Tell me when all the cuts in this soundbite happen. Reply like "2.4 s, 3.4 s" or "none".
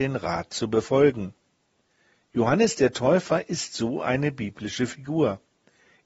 none